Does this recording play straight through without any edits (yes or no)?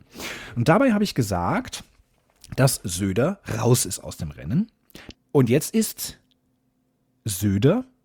no